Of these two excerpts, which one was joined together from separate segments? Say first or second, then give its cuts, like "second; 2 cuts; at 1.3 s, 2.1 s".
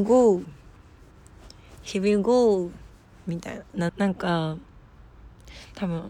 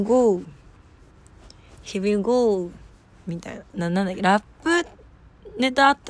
first; 1 cut; at 3.9 s